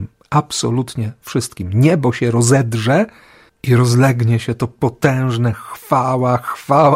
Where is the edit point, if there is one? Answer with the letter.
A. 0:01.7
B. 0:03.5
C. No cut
B